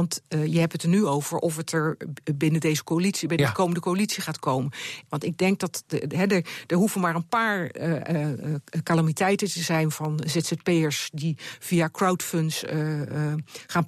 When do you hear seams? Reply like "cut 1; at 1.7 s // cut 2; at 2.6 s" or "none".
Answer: cut 1; at 5.1 s